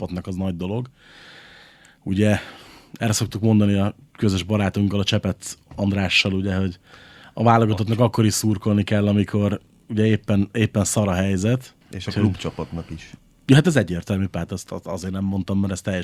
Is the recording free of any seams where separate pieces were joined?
no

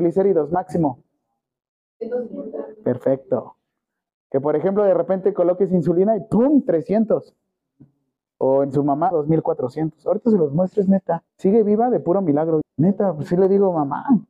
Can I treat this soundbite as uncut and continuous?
no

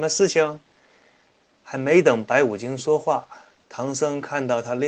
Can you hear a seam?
no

